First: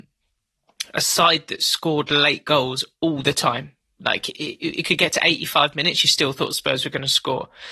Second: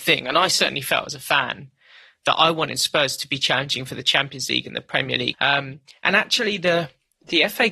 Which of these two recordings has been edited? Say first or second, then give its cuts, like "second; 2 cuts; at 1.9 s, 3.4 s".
second; 1 cut; at 5.3 s